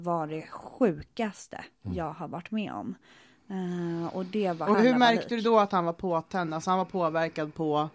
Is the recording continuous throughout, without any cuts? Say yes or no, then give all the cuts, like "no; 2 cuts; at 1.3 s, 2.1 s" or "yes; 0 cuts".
no; 1 cut; at 4.7 s